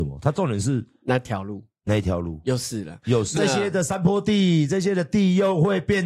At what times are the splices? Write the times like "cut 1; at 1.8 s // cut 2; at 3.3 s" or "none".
cut 1; at 3.4 s

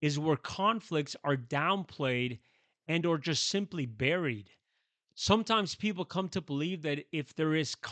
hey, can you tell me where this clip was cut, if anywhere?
none

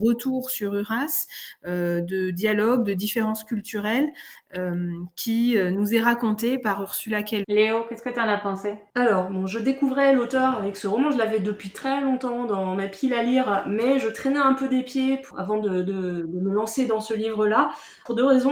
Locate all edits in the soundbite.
cut 1; at 7.4 s

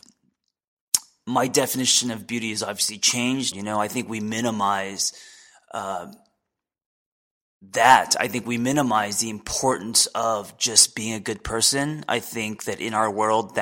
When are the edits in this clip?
cut 1; at 3.5 s

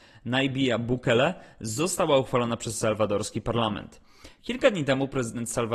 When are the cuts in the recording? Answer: none

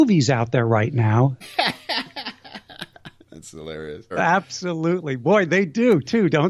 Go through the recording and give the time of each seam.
cut 1; at 1.4 s // cut 2; at 4.1 s

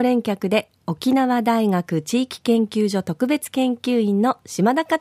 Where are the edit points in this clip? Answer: none

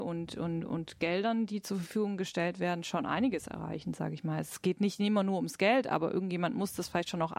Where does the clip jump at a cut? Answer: none

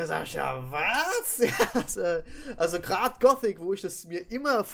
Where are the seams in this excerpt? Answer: cut 1; at 1.9 s

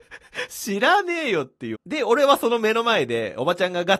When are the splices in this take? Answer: cut 1; at 1.7 s

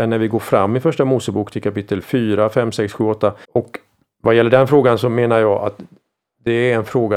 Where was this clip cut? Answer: cut 1; at 3.4 s

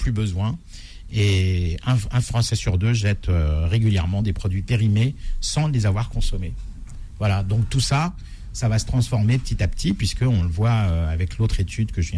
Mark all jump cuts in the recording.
none

